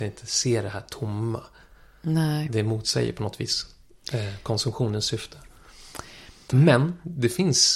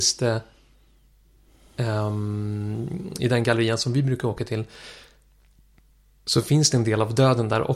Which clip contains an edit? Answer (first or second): first